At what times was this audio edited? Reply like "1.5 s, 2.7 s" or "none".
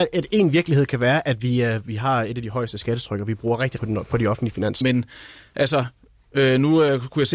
3.8 s, 4.8 s